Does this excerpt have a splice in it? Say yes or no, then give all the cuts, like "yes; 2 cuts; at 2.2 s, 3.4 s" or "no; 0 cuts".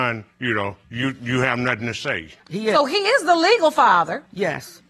yes; 1 cut; at 2.4 s